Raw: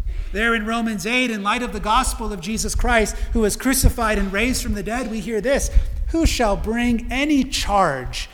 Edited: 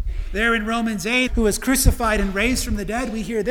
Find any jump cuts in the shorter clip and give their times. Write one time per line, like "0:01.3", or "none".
0:01.3